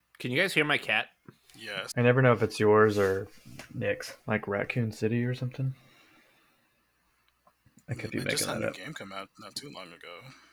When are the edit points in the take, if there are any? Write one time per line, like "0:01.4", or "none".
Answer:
0:01.9
0:04.2
0:08.1